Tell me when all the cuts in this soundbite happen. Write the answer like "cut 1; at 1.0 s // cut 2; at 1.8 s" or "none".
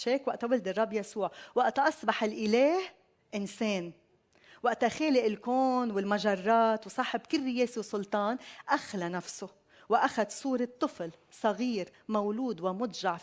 none